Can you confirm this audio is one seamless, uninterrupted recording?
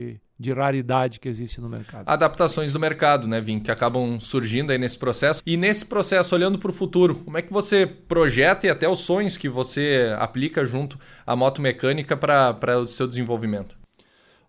no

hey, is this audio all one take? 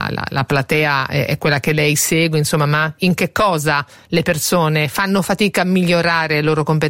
yes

